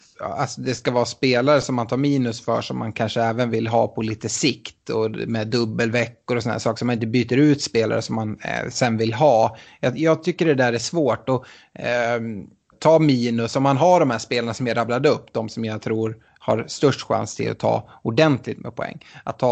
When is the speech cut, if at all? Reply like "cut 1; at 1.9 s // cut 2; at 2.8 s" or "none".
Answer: cut 1; at 12.7 s